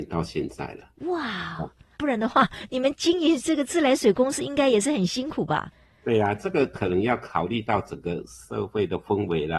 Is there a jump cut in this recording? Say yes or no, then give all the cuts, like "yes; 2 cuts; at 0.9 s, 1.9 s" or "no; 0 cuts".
yes; 1 cut; at 2.0 s